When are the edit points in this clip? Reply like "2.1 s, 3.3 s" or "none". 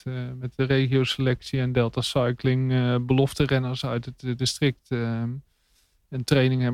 none

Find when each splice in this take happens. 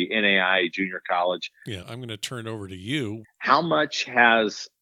1.8 s, 3.2 s

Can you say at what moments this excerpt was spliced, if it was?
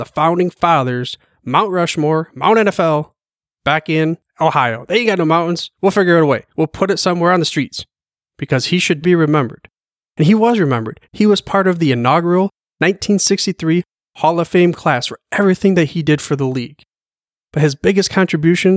9.0 s, 11.0 s

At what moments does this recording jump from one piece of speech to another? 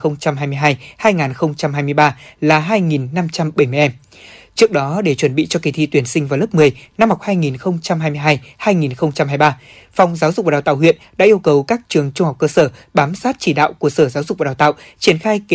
none

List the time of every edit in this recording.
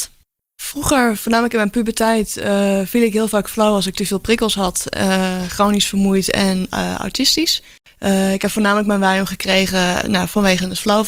10.0 s

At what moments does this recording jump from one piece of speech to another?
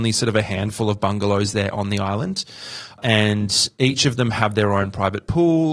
none

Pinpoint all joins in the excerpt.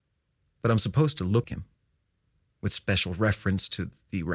1.4 s

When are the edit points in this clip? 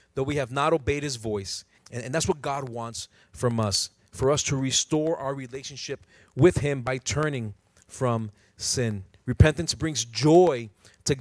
1.8 s

